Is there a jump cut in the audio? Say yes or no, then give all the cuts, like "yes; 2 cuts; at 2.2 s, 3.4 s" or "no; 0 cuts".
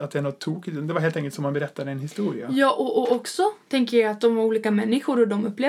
no; 0 cuts